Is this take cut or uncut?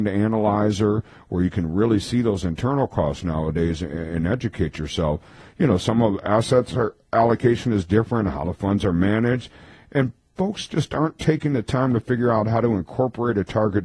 uncut